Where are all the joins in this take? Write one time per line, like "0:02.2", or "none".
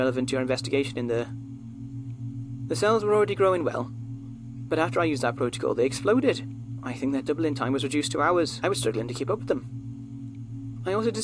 0:08.6